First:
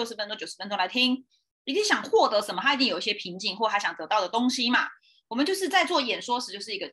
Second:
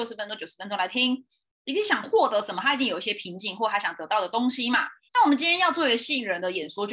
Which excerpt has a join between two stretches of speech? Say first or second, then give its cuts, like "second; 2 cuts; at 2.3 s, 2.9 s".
second; 1 cut; at 5.1 s